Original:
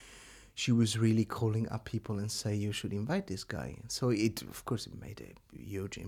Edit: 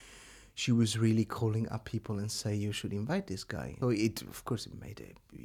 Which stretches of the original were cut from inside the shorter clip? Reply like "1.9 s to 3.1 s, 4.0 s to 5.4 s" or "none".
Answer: 3.8 s to 4.0 s